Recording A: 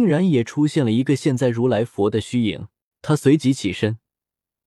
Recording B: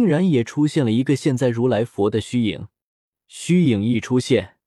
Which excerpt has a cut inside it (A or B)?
A